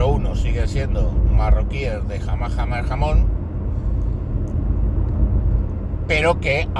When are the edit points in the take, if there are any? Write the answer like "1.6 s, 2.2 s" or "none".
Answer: none